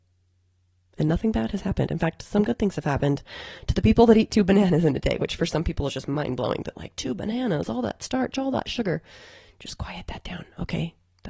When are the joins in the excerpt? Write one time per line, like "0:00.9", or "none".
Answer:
none